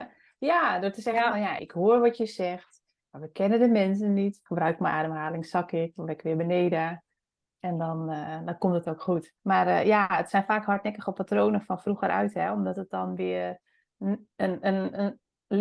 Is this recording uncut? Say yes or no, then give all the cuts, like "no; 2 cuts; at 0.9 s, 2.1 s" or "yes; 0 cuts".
no; 3 cuts; at 1.6 s, 4.5 s, 9.4 s